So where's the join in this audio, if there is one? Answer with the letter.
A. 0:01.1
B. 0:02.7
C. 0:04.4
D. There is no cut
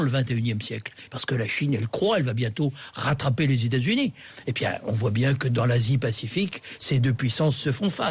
A